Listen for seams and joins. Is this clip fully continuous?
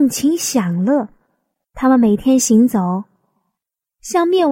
no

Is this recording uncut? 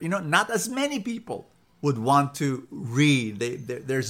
yes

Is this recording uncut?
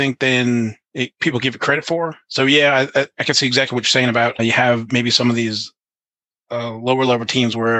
yes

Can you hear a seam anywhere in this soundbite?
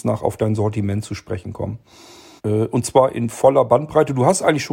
yes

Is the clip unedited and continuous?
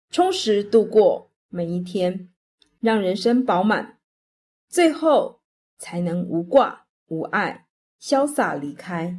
yes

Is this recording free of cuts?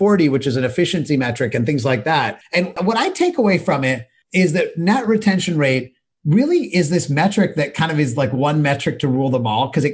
yes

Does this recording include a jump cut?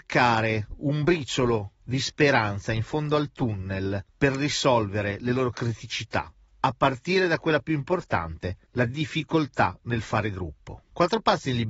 no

